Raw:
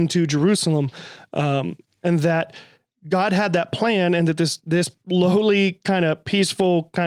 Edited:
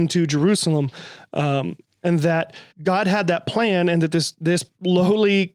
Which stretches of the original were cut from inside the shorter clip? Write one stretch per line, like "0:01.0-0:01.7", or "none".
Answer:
0:02.7-0:03.0